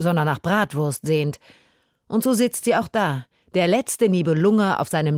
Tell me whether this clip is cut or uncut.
cut